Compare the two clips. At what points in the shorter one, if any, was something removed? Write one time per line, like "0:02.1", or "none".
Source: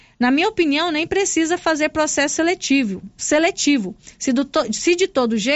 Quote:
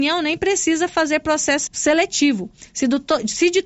0:01.7